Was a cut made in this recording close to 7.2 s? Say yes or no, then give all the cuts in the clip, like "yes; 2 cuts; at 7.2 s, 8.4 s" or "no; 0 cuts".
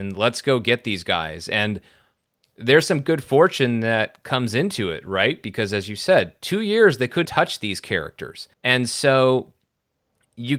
yes; 2 cuts; at 7.2 s, 8.5 s